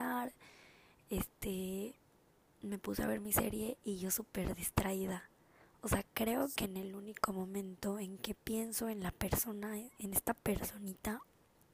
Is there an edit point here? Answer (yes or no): no